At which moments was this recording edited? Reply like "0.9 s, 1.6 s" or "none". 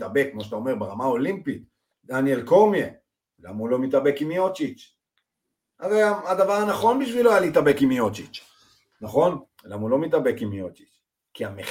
9.5 s